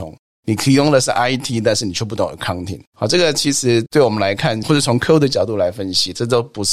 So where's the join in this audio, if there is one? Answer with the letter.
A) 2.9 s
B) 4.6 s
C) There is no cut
C